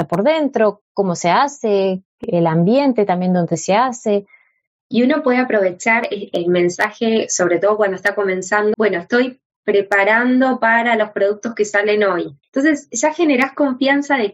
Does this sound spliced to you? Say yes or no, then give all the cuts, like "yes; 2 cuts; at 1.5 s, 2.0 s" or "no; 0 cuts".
yes; 3 cuts; at 6.3 s, 8.7 s, 12.4 s